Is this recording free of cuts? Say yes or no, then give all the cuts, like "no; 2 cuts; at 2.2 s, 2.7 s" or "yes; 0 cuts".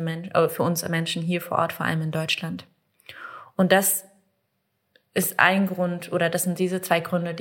yes; 0 cuts